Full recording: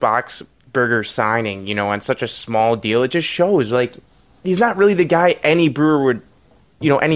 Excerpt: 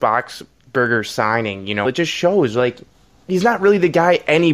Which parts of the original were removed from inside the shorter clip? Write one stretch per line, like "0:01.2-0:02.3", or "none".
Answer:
0:01.8-0:03.0